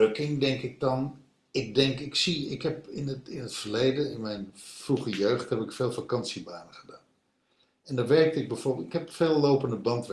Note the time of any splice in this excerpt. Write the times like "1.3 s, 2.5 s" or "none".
none